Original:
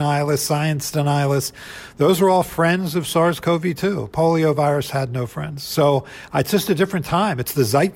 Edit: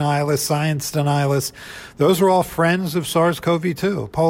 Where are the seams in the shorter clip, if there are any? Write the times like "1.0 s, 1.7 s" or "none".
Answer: none